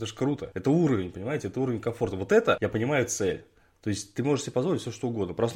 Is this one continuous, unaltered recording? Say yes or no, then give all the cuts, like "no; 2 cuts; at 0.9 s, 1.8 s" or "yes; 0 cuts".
yes; 0 cuts